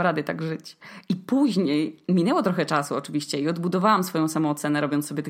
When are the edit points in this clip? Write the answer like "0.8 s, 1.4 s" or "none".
none